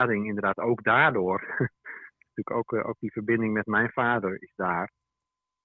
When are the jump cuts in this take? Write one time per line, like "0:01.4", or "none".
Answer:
0:04.4